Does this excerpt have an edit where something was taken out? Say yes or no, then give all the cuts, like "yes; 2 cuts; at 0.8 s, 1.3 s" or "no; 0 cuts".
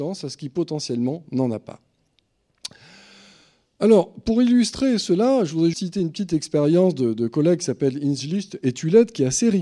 yes; 1 cut; at 5.7 s